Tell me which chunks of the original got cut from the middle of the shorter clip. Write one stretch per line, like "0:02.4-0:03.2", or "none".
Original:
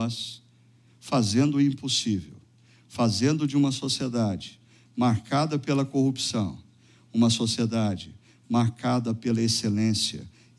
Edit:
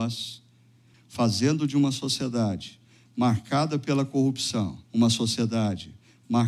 0:00.9-0:02.7
0:06.6-0:07.0